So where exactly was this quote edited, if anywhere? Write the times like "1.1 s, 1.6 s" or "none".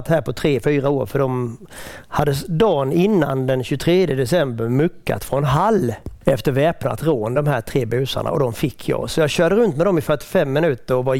none